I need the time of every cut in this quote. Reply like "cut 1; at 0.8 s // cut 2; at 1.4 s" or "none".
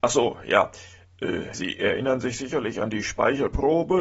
cut 1; at 1.5 s

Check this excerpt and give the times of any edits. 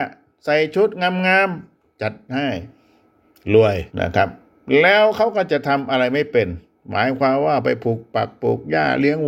cut 1; at 3.9 s

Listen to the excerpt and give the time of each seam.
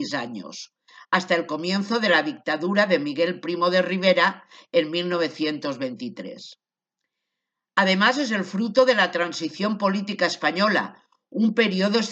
none

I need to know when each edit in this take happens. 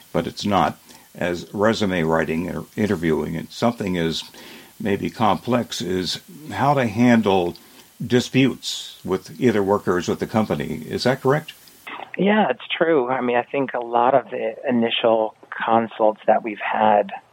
cut 1; at 7.9 s

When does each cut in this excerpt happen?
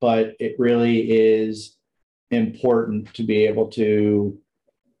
none

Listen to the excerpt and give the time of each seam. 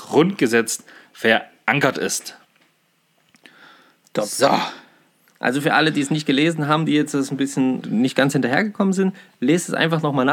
cut 1; at 7.8 s

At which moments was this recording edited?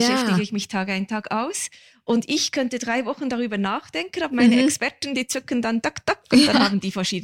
cut 1; at 5.8 s

